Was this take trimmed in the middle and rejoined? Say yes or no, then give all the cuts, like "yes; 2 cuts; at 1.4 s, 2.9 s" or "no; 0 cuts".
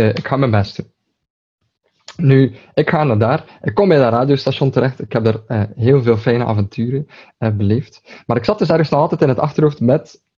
no; 0 cuts